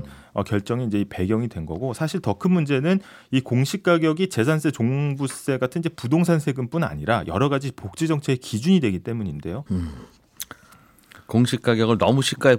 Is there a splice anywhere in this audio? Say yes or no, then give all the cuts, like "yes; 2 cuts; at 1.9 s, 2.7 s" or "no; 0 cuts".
yes; 1 cut; at 9.7 s